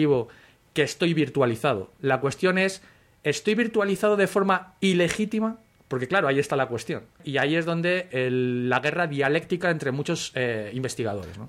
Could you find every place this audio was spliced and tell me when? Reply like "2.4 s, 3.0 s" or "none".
none